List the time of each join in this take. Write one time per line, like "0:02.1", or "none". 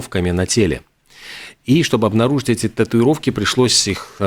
0:01.6